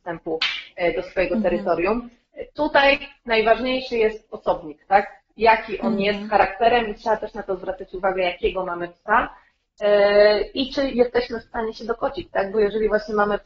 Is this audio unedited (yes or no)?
yes